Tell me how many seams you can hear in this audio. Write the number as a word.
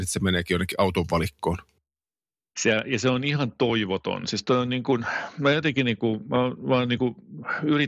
zero